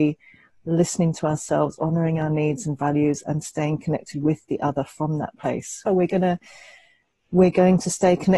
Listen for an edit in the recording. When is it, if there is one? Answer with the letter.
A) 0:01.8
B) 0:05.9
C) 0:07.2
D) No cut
B